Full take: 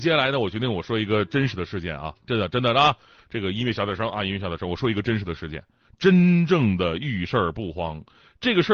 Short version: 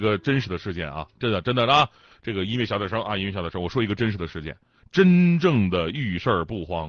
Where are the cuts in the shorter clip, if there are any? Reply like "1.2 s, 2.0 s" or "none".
none

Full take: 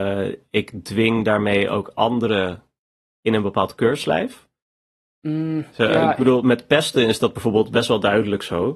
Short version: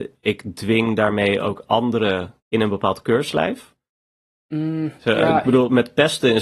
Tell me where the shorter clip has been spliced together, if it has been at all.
2.4 s

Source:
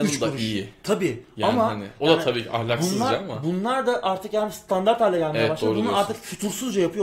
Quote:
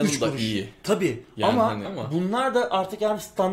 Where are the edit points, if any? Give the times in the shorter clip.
1.8 s

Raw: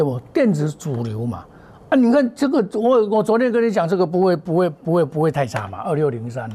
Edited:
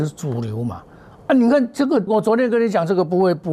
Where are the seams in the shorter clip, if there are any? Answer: 2.1 s

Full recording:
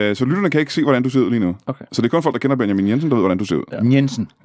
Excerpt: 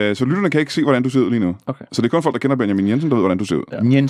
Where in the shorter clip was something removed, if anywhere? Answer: none

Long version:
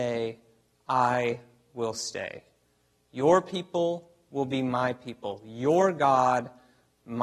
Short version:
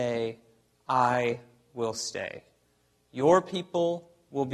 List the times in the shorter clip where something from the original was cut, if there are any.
none

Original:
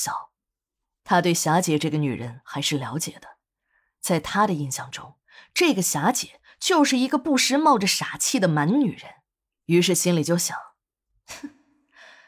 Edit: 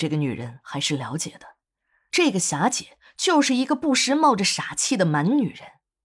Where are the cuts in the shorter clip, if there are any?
2.1 s

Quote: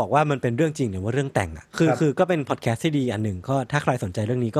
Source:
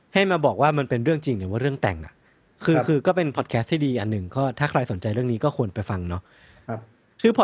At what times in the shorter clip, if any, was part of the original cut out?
1.7 s

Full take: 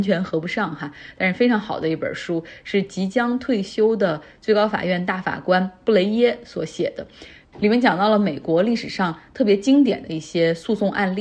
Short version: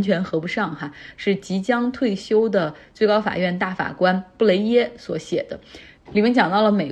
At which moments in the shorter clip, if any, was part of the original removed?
1.1 s

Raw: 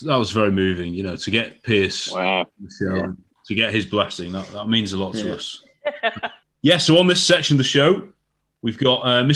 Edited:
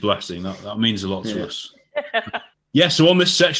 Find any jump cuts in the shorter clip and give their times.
none

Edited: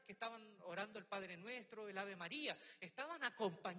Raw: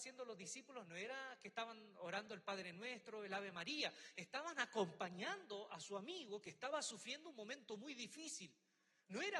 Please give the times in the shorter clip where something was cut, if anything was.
none

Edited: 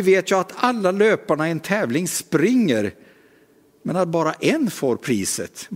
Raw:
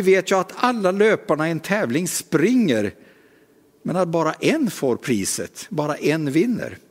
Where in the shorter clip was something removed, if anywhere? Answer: none

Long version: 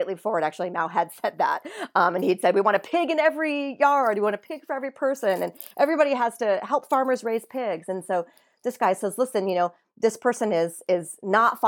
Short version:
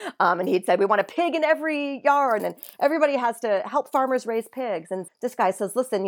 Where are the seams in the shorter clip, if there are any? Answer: 2.4 s, 5.1 s

